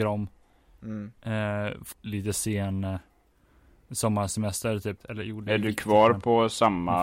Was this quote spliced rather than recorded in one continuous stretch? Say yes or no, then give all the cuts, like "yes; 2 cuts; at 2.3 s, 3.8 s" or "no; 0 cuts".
yes; 2 cuts; at 1.9 s, 5.0 s